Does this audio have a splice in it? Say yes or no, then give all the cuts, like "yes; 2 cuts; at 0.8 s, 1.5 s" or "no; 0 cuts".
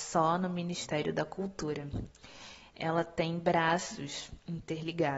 no; 0 cuts